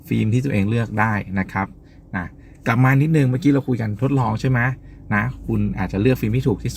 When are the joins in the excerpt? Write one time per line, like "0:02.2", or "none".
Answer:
none